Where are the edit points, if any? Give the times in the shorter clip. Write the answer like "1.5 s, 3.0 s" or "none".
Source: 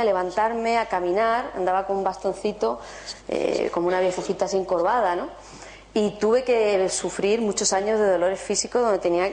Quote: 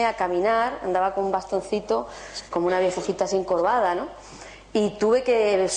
2.5 s

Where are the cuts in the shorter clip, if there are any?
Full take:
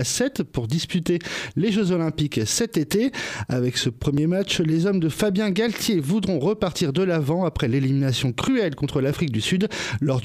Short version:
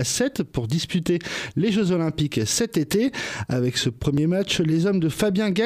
none

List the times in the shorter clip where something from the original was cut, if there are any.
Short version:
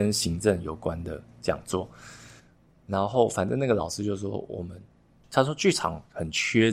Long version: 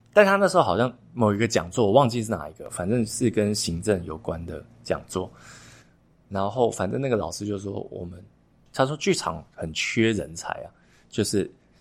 none

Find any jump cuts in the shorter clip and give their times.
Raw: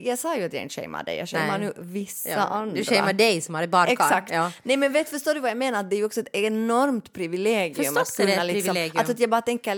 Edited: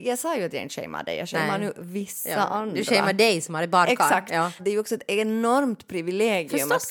4.6 s

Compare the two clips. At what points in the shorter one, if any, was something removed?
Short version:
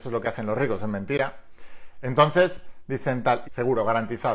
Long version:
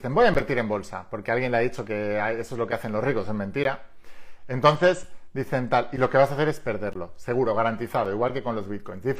3.4 s

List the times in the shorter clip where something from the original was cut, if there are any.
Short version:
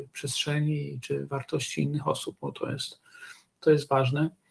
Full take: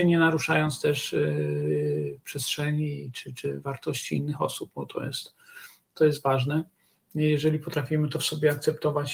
1.0 s

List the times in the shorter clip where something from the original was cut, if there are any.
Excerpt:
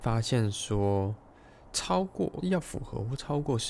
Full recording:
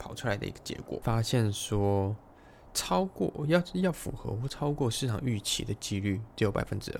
2.4 s

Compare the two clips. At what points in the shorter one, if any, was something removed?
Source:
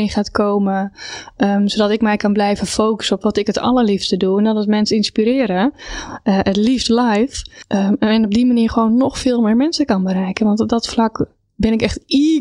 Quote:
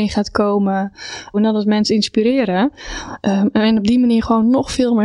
1.3 s, 3.2 s

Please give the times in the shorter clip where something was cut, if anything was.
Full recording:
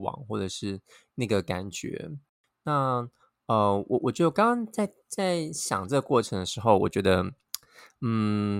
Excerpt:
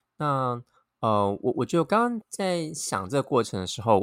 2.2 s

